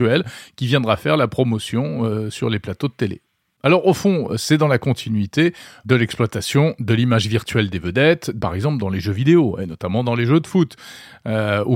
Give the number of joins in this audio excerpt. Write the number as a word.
zero